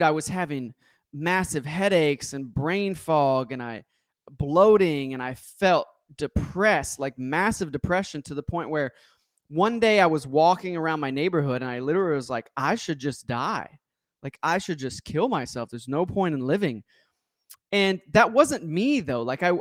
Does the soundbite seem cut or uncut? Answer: uncut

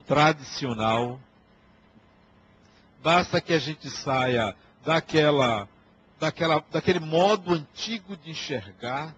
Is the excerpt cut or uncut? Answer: uncut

